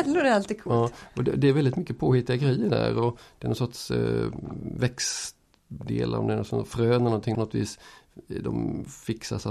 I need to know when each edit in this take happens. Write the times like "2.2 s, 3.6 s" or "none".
7.3 s